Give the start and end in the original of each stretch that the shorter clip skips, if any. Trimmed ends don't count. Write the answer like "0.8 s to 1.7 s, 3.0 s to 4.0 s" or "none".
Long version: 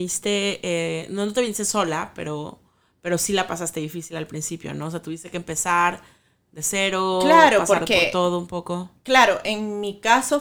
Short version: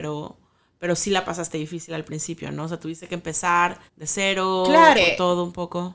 6.1 s to 6.4 s, 7.5 s to 7.9 s